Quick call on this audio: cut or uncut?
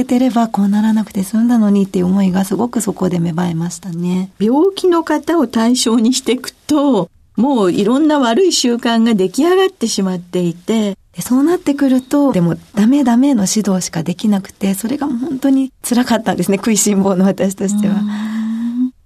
cut